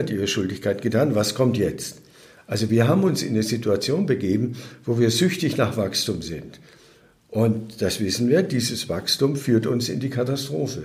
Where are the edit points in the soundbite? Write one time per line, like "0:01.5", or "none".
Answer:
none